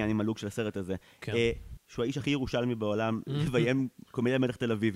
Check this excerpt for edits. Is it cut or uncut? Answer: cut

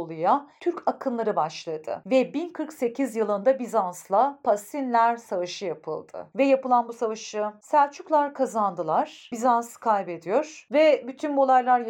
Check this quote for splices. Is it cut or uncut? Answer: cut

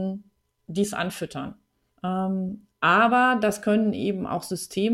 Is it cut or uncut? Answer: cut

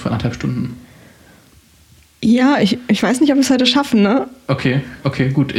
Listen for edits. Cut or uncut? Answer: uncut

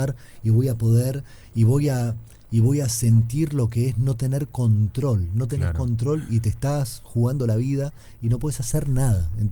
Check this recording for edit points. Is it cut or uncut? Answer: uncut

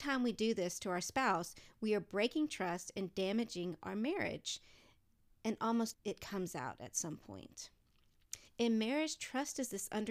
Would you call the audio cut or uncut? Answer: cut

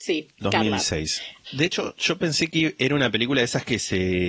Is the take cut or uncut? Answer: cut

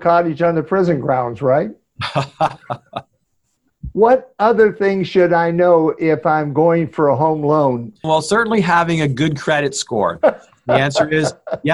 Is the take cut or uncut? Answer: cut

